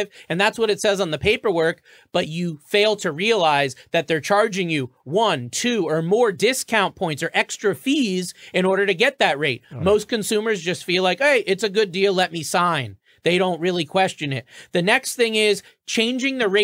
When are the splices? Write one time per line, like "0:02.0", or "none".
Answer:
none